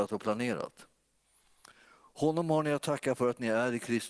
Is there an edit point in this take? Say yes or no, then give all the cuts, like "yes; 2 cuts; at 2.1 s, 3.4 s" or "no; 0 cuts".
no; 0 cuts